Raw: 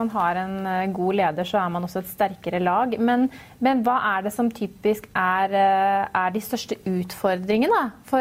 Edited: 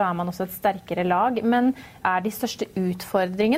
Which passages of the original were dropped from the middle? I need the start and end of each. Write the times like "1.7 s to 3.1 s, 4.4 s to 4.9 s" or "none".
3.6 s to 6.1 s